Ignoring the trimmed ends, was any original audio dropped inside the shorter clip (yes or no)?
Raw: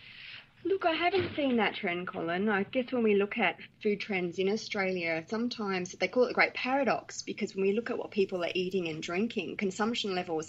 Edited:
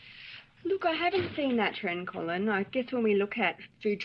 no